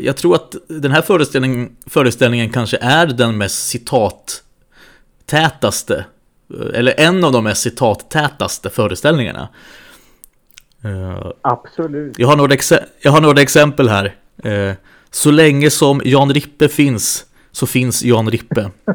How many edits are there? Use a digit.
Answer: 0